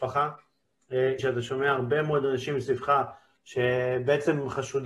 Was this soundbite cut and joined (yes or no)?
yes